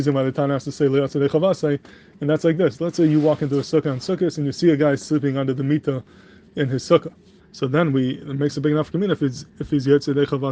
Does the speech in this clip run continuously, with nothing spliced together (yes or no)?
no